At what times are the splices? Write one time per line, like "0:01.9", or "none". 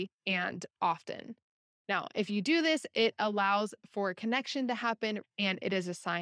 0:05.2